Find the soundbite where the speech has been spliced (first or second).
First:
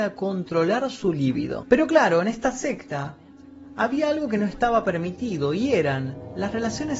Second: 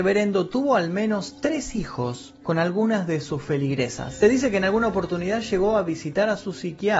second